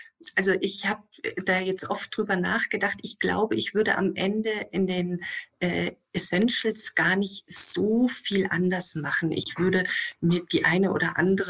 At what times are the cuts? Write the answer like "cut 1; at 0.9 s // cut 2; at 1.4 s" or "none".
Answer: none